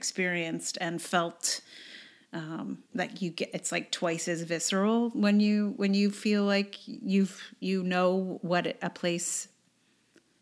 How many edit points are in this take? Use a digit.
1